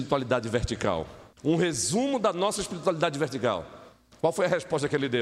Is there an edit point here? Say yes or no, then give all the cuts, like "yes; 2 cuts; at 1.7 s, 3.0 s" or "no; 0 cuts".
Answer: yes; 1 cut; at 1.3 s